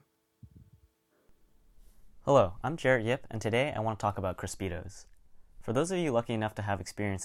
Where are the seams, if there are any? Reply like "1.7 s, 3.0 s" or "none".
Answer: none